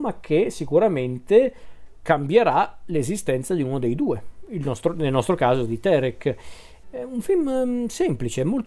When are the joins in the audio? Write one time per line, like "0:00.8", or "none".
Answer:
0:06.8